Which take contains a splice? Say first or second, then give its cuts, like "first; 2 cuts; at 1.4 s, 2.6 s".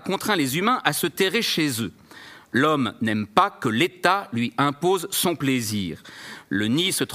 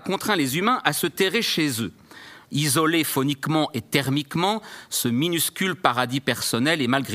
second; 1 cut; at 2.4 s